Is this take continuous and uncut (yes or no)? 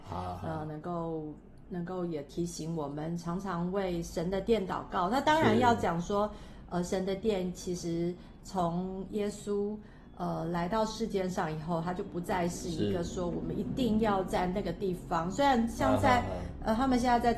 yes